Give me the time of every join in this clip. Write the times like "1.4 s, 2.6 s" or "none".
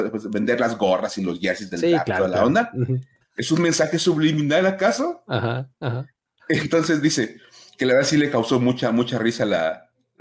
3.2 s

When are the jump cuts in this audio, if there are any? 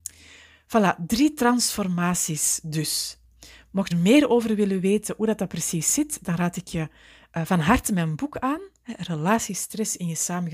3.9 s

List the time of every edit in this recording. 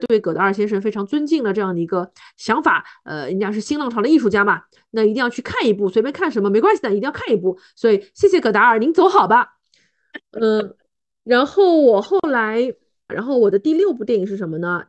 13.1 s

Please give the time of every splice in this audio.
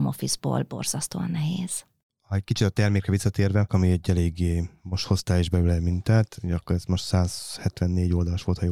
3.7 s

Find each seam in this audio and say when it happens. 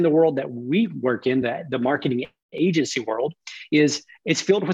1.4 s

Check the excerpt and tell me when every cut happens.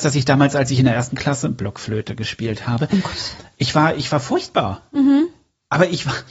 none

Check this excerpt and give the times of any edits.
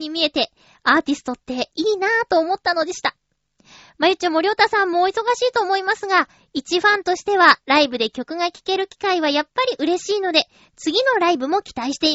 none

